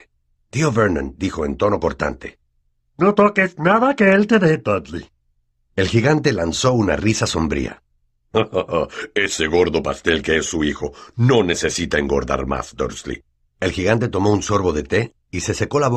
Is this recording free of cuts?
no; 1 cut; at 13.5 s

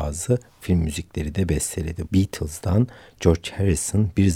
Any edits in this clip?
yes; 1 cut; at 2.1 s

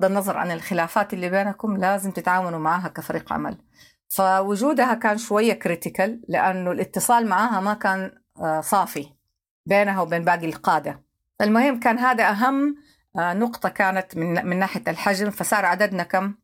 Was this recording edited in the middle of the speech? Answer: no; 0 cuts

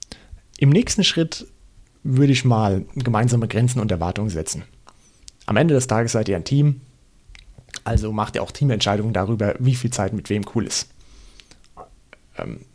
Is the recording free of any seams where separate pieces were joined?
yes; 0 cuts

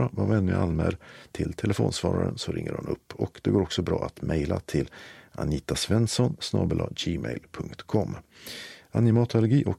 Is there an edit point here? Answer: no; 0 cuts

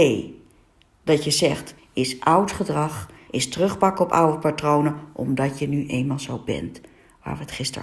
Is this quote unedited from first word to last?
no; 2 cuts; at 1.8 s, 3.3 s

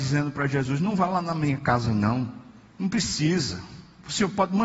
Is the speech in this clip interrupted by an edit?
no; 0 cuts

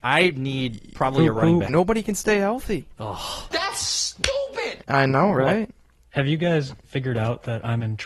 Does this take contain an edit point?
yes; 1 cut; at 1.7 s

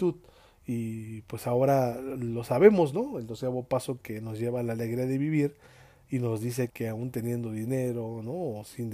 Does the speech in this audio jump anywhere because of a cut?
yes; 1 cut; at 6.7 s

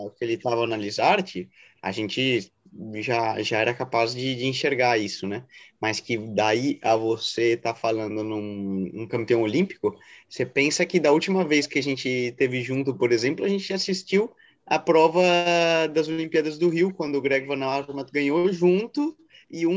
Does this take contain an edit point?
no; 0 cuts

